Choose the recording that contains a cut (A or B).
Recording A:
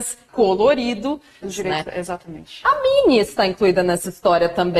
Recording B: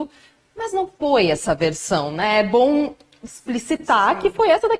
A